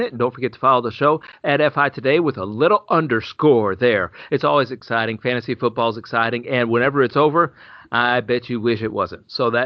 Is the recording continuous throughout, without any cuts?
no; 1 cut; at 4.3 s

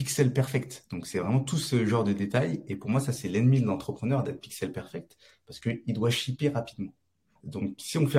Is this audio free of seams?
yes; 0 cuts

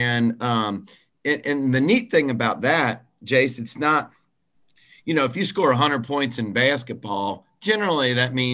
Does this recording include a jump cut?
no; 0 cuts

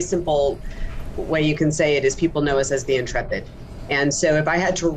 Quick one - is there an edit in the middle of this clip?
no; 0 cuts

